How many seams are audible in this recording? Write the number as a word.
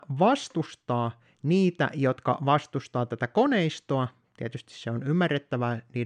zero